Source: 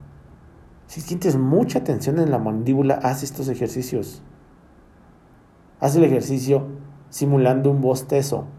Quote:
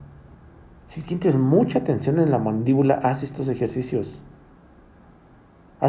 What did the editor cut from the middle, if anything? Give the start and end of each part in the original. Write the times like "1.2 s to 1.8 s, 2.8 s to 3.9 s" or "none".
none